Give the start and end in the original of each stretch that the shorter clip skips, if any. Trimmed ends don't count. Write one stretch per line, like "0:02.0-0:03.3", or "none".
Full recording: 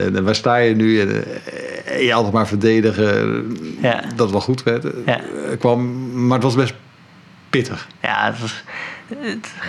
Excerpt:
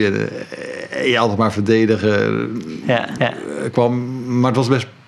0:04.1-0:05.0